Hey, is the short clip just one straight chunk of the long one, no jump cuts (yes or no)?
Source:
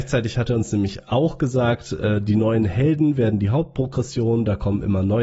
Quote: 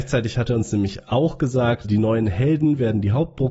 no